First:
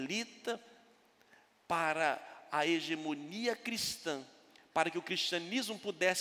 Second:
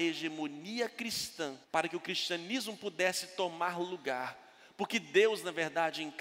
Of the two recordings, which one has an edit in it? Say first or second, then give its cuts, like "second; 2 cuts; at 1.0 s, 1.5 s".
second; 1 cut; at 1.6 s